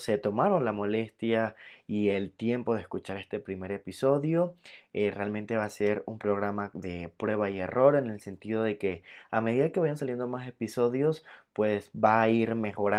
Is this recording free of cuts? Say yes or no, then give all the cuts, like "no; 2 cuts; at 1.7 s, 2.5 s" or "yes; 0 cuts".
yes; 0 cuts